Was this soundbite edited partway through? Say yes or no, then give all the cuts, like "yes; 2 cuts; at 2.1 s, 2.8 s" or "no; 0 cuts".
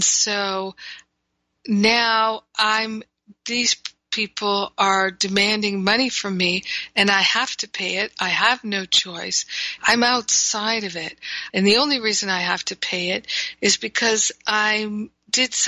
yes; 2 cuts; at 9.8 s, 11.5 s